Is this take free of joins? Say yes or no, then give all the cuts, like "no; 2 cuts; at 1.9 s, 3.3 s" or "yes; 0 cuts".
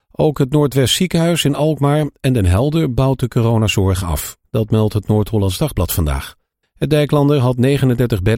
no; 2 cuts; at 4.4 s, 6.6 s